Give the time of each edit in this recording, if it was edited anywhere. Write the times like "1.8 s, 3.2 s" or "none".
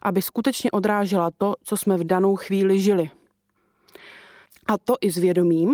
4.5 s